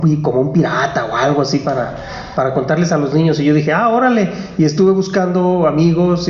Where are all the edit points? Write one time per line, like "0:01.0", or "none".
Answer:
none